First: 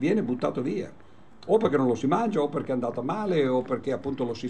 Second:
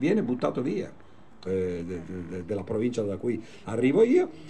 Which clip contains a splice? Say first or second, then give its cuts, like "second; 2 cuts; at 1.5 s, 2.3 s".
second; 1 cut; at 1.4 s